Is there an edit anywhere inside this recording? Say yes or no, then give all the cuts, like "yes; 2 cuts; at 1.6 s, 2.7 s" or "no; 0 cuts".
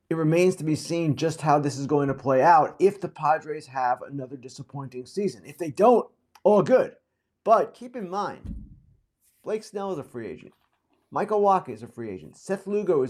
no; 0 cuts